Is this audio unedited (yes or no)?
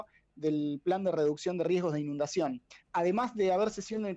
no